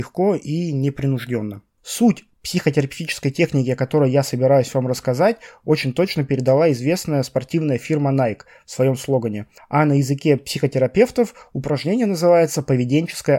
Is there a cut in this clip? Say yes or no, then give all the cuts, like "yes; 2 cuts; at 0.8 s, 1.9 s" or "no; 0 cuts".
yes; 1 cut; at 9.6 s